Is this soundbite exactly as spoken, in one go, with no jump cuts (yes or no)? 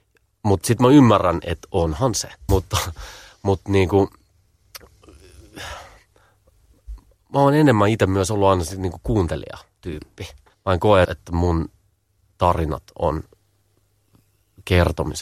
no